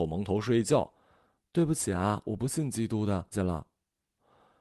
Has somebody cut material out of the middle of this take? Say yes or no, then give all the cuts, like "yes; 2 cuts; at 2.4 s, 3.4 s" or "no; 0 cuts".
yes; 1 cut; at 3.3 s